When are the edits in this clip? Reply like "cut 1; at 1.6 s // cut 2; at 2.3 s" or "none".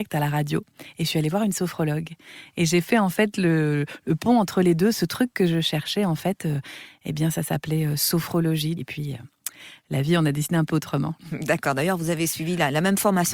cut 1; at 8.8 s // cut 2; at 11.2 s